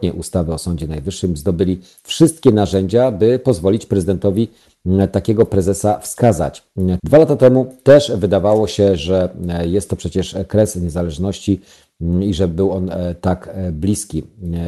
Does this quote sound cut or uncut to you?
cut